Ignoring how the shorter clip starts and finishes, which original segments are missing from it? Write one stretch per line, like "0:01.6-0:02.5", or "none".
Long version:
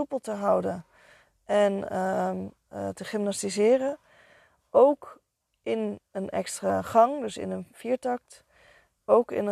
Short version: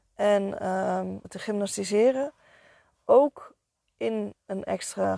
0:02.5-0:02.9